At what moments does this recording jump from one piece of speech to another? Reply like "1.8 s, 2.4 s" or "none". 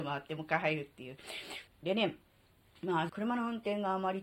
1.7 s, 3.1 s